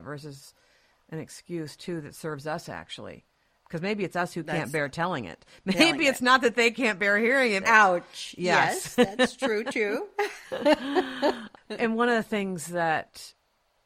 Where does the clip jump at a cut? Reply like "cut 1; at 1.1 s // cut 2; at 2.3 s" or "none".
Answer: cut 1; at 7.6 s